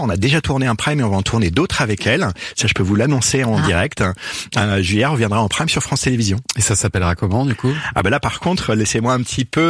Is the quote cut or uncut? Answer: uncut